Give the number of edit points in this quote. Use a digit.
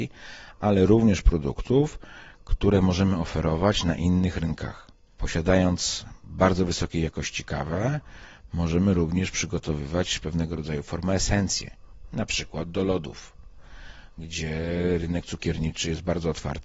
1